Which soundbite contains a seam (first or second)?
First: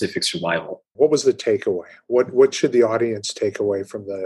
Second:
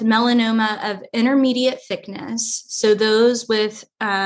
first